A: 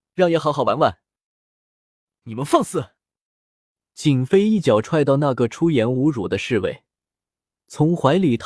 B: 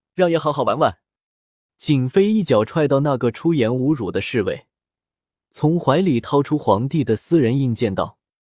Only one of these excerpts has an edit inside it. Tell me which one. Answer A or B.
B